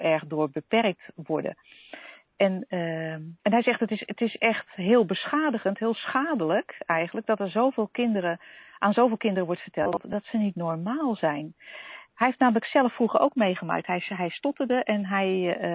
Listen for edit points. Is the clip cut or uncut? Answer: cut